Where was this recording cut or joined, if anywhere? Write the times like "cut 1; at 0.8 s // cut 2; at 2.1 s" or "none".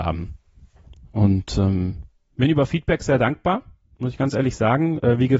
none